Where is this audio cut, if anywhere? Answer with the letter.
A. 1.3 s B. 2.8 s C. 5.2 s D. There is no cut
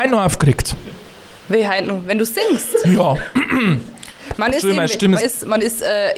C